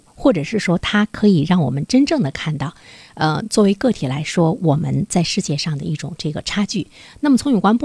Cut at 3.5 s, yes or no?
no